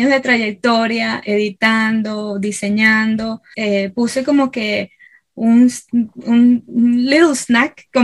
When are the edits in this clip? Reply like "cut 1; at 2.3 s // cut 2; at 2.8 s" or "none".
cut 1; at 3.5 s